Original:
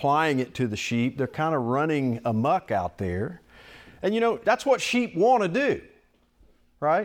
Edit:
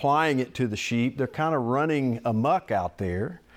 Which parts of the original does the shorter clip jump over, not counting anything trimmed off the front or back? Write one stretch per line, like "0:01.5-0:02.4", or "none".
none

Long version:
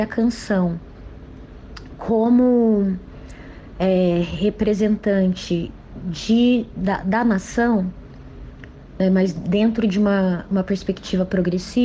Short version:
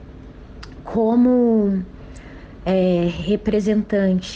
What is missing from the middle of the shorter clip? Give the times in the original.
none

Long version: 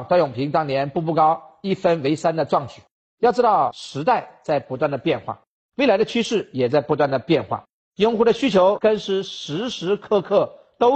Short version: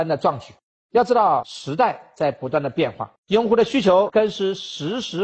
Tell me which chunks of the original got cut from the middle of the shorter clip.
0:05.5-0:07.9

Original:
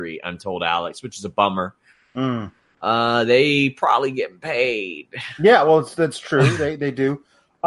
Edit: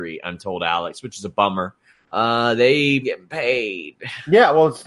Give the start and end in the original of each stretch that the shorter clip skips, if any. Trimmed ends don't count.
0:02.0-0:02.7
0:03.7-0:04.1

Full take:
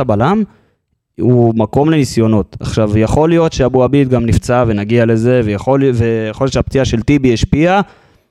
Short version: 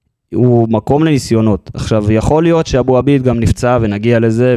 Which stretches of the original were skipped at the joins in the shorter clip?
none

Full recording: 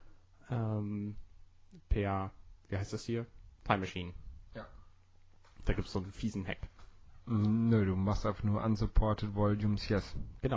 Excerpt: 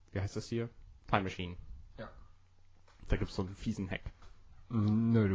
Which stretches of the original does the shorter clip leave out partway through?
none

